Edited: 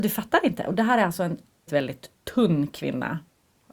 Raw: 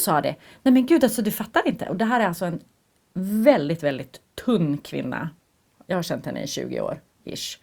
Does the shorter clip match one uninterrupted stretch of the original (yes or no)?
no